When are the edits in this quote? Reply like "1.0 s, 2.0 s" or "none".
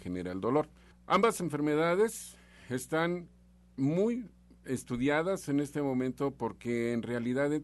0.9 s